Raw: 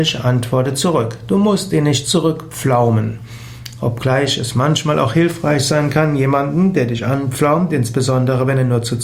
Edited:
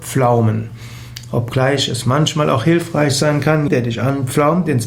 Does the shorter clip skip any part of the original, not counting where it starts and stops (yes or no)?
yes